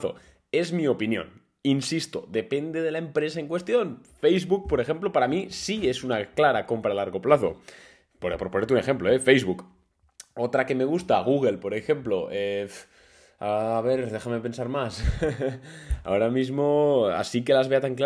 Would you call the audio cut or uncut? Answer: uncut